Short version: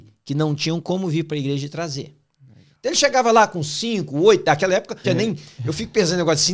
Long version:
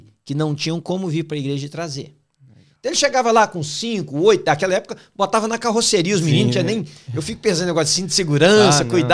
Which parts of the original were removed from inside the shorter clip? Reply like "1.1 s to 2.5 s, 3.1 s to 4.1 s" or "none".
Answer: 5.0 s to 6.5 s